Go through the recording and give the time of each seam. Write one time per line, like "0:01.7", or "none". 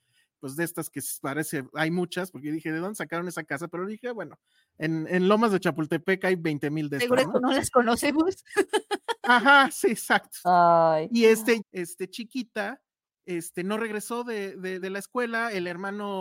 0:10.4
0:11.6
0:14.8